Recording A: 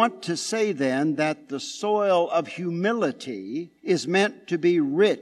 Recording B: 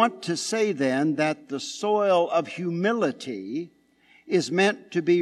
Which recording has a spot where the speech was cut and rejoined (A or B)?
A